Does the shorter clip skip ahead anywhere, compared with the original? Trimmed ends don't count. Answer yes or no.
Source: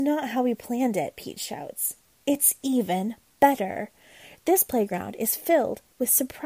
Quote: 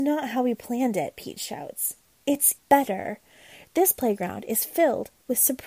yes